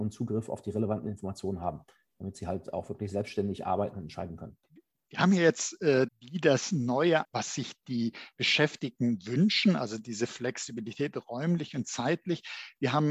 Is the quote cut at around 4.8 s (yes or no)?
no